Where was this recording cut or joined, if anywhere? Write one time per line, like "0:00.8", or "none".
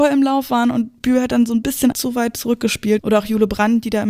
0:01.9
0:03.0